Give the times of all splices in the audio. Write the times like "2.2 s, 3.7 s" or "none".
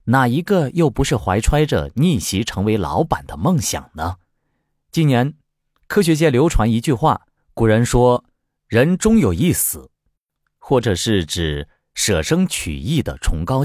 7.4 s, 10.4 s